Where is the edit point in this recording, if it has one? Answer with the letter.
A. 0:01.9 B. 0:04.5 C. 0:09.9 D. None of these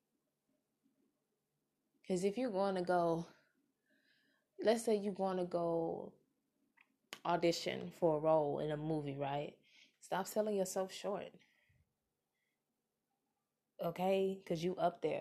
C